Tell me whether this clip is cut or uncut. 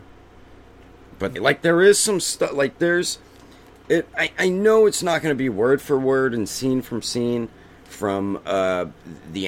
cut